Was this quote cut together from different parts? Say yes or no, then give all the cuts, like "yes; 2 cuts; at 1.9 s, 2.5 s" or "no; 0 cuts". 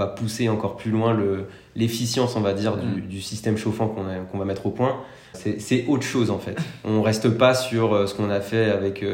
no; 0 cuts